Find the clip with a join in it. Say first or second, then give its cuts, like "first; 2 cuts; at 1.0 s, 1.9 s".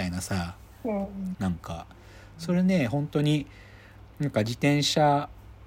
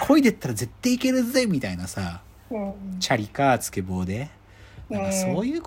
first; 1 cut; at 1.3 s